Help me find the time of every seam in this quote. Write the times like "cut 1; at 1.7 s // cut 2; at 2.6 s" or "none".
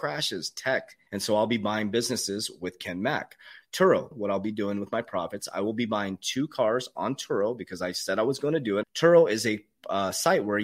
cut 1; at 1.1 s // cut 2; at 4.1 s // cut 3; at 8.8 s